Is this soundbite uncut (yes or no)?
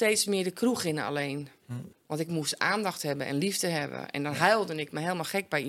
no